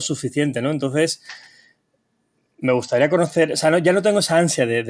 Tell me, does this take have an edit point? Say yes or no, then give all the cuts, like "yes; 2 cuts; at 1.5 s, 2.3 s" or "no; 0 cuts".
no; 0 cuts